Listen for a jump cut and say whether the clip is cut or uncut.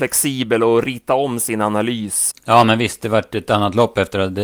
cut